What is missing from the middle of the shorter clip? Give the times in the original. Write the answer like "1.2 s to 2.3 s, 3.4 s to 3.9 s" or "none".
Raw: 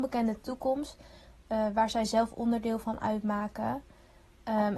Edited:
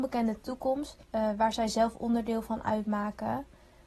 1.0 s to 1.4 s